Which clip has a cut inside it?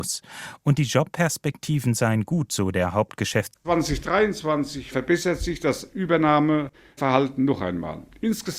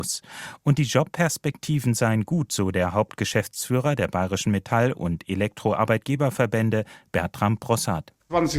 first; 1 cut; at 3.5 s

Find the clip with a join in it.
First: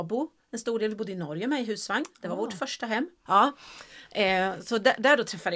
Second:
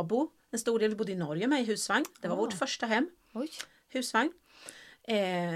first; 1 cut; at 3.2 s

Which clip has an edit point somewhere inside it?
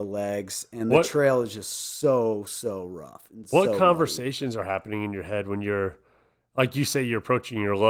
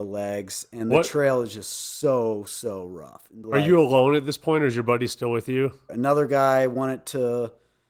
second; 2 cuts; at 3.4 s, 5.9 s

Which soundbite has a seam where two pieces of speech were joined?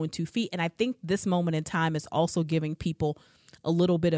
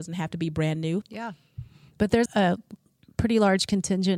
second; 2 cuts; at 1.0 s, 2.3 s

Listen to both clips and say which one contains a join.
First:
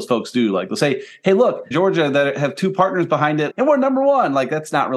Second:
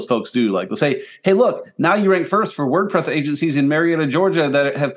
first; 2 cuts; at 1.7 s, 3.5 s

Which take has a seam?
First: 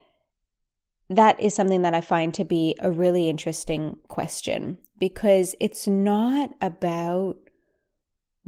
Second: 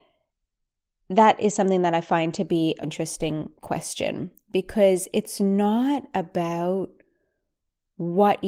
second; 1 cut; at 2.8 s

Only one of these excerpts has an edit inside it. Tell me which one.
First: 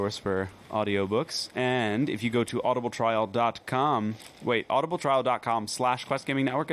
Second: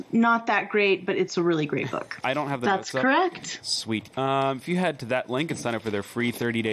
second; 2 cuts; at 2.2 s, 4.1 s

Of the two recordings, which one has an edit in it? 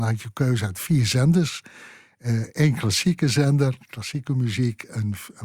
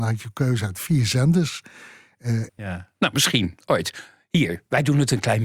second; 1 cut; at 2.5 s

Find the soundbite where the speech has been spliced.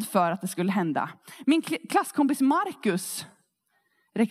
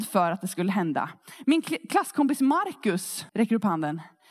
second; 1 cut; at 3.3 s

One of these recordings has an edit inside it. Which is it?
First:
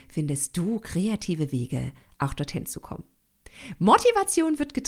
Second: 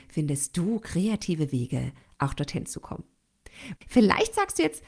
second; 1 cut; at 3.8 s

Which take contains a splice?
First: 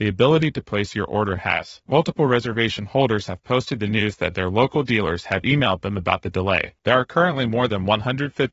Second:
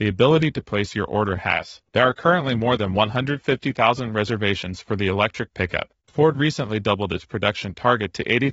second; 2 cuts; at 1.9 s, 6.0 s

